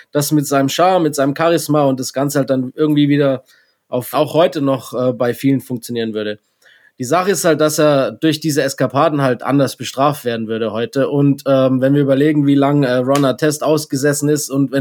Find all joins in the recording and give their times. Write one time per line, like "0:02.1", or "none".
0:04.1